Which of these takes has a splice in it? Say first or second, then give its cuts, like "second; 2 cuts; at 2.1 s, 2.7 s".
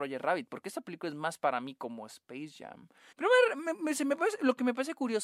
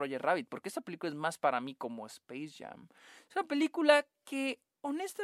first; 1 cut; at 3.1 s